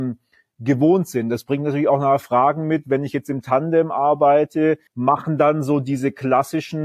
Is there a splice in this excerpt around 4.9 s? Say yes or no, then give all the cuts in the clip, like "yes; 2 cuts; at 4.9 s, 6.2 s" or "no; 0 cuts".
yes; 1 cut; at 4.9 s